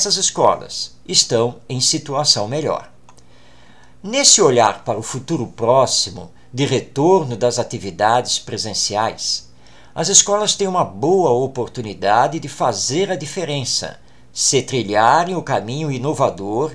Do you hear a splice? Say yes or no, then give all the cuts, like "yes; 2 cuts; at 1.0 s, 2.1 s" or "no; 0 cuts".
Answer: no; 0 cuts